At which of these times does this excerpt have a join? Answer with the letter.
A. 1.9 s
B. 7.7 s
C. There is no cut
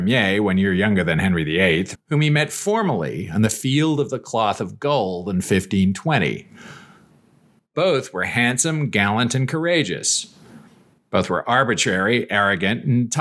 A